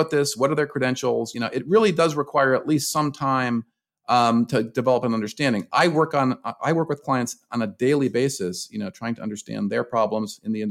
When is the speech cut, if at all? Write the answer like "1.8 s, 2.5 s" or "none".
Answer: none

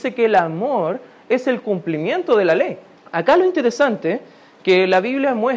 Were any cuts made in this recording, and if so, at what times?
3.0 s

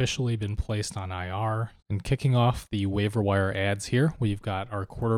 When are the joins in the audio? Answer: 1.8 s

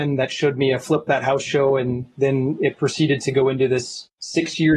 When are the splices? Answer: none

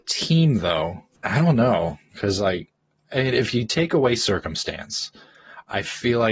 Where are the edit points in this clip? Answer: 1.1 s

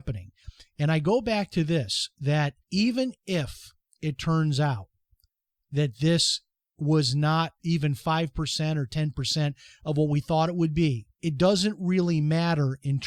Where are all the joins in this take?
2.6 s, 7.6 s, 11.1 s

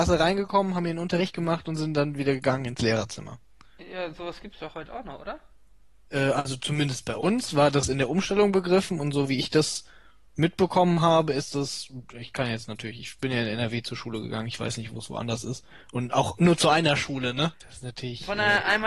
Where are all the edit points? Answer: 17.5 s

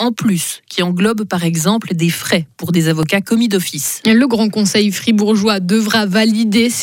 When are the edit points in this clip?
none

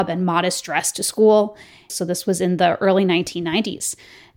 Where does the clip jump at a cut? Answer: 1.9 s

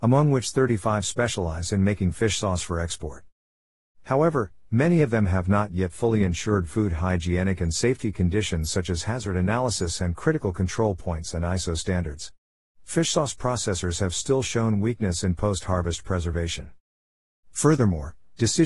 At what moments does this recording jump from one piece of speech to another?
none

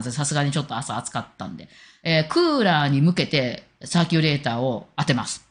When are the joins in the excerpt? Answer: none

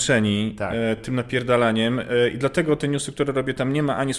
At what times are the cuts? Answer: none

